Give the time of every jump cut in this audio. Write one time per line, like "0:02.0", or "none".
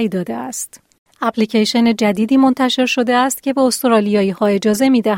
none